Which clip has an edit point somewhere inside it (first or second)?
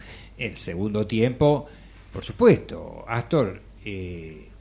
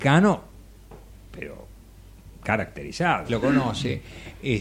second